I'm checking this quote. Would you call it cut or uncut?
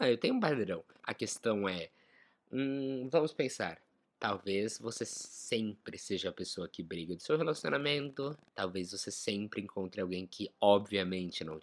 cut